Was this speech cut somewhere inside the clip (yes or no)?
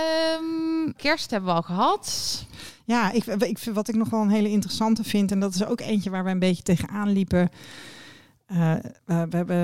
yes